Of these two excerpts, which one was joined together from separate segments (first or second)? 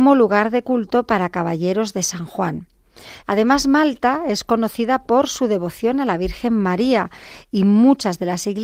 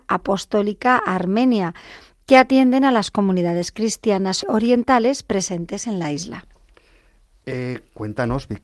first